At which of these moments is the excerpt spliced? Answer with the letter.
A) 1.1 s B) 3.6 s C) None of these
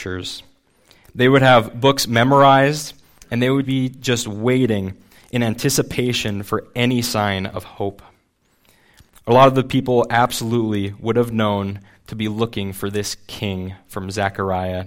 B